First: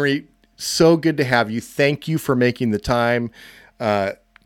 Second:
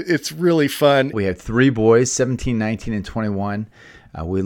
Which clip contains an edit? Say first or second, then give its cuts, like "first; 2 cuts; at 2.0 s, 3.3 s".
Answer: second; 1 cut; at 1.1 s